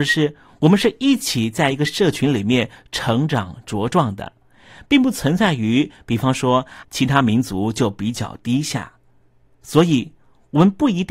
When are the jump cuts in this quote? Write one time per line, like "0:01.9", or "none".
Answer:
0:06.8